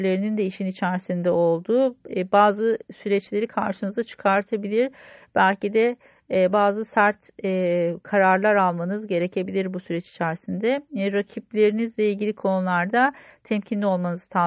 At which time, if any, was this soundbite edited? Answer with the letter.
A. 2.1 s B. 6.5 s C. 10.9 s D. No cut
A